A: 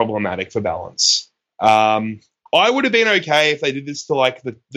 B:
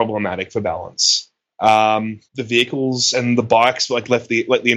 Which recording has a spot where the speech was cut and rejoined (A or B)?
B